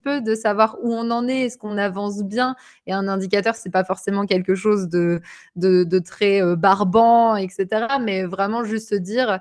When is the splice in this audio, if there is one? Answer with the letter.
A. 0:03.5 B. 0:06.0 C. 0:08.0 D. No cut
D